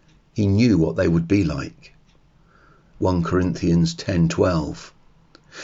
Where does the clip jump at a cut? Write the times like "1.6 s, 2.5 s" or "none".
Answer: 2.9 s